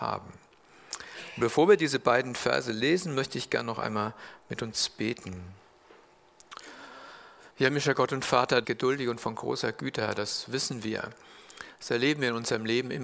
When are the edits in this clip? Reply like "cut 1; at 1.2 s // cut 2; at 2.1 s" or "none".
cut 1; at 7.5 s // cut 2; at 8.6 s